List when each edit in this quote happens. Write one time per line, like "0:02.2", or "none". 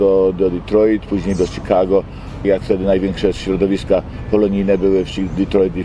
0:02.4